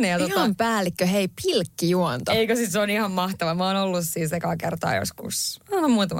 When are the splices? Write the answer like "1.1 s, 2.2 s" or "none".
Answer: none